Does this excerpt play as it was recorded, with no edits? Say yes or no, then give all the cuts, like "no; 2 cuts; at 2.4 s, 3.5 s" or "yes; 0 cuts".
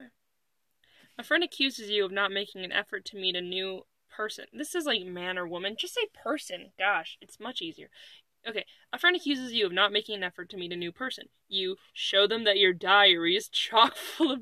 yes; 0 cuts